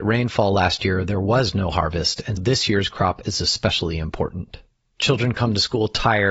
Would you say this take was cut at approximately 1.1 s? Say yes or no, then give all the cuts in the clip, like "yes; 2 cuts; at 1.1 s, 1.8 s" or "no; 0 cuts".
no; 2 cuts; at 2.4 s, 4.8 s